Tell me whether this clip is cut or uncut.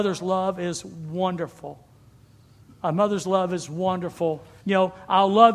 cut